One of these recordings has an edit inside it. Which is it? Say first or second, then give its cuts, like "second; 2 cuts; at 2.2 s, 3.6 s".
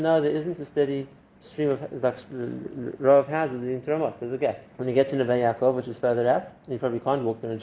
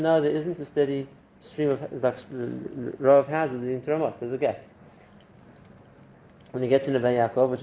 first; 1 cut; at 4.7 s